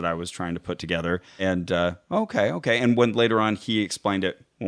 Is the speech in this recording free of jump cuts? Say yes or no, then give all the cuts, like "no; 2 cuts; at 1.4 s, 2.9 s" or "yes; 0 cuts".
yes; 0 cuts